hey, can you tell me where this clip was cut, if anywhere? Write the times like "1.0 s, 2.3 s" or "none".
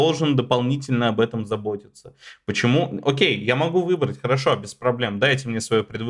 none